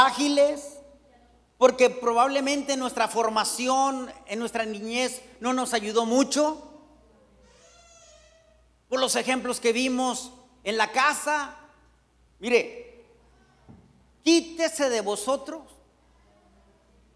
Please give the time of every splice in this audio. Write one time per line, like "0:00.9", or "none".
0:12.3
0:14.1

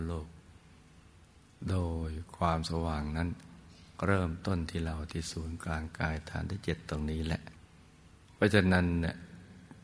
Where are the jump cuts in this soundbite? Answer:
0:08.2

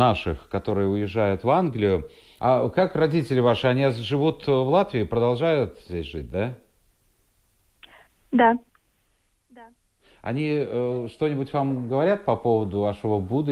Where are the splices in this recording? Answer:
0:02.4

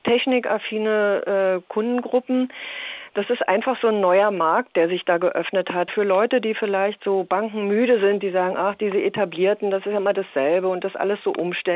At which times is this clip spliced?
none

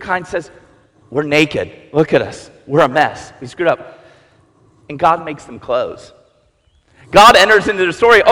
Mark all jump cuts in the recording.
none

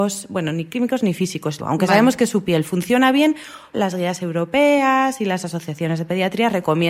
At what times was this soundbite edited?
0:01.6
0:03.7

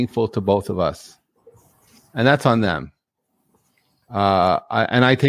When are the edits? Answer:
none

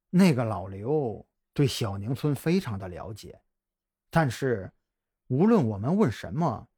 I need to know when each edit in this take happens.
none

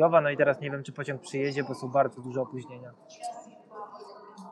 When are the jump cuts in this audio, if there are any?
none

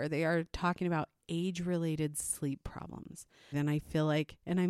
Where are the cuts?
0:03.5

